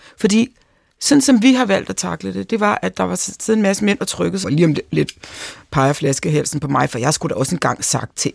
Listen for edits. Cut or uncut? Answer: cut